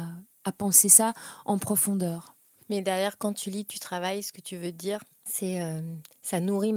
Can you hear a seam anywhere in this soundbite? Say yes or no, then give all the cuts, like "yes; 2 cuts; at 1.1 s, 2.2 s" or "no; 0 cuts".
no; 0 cuts